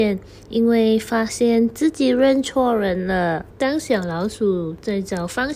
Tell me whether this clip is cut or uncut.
cut